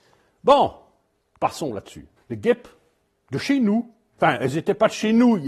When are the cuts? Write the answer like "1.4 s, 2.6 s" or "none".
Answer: 2.2 s